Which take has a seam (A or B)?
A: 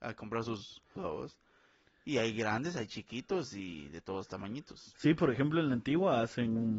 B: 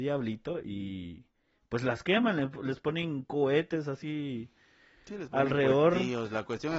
A